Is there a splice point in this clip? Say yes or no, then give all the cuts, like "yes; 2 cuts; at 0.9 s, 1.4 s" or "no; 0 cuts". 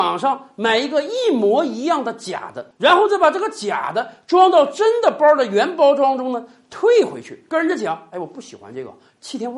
no; 0 cuts